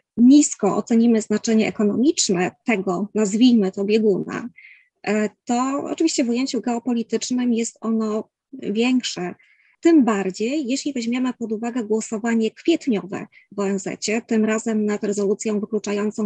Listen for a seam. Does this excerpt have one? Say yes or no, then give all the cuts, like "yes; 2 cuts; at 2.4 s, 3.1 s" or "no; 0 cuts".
no; 0 cuts